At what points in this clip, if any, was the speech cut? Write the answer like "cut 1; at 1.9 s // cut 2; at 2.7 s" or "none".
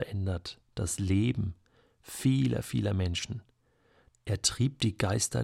cut 1; at 4.1 s